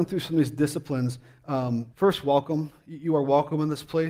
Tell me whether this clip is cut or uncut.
cut